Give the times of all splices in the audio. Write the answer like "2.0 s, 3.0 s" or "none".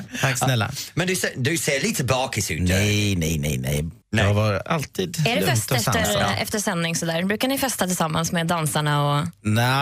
4.0 s